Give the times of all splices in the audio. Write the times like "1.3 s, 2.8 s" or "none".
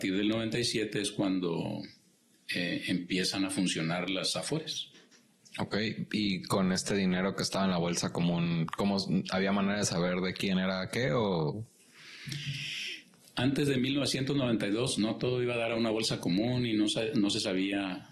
none